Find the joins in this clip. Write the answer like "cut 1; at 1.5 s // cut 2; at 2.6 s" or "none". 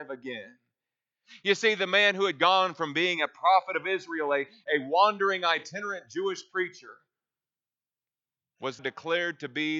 cut 1; at 8.8 s